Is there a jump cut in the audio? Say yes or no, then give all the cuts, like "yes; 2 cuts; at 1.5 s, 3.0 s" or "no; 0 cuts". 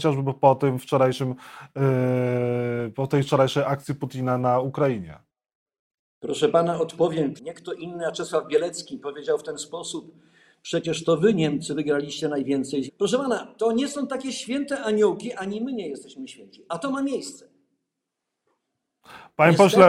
yes; 3 cuts; at 7.4 s, 12.9 s, 16.7 s